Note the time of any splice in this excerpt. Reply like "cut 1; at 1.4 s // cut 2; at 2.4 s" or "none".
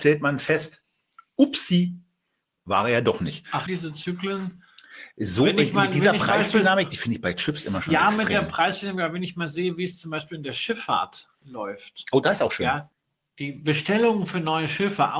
cut 1; at 3.7 s